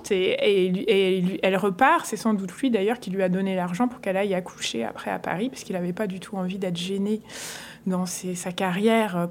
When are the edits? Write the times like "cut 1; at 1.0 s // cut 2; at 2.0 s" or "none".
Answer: none